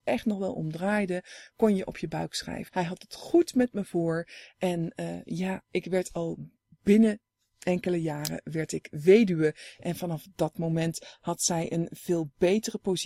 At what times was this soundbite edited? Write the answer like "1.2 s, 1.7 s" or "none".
2.7 s